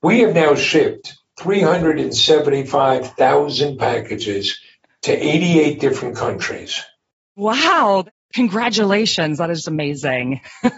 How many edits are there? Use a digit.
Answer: 1